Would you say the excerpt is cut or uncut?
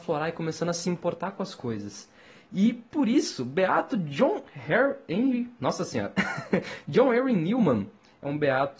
uncut